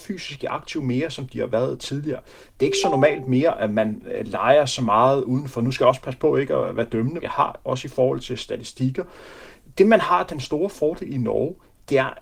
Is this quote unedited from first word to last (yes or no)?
no